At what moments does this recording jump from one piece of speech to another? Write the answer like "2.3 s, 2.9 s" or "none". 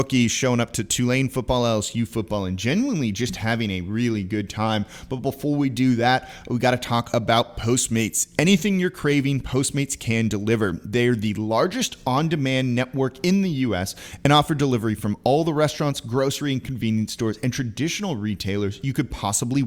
none